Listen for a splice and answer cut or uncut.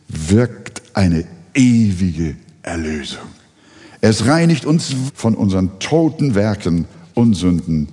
cut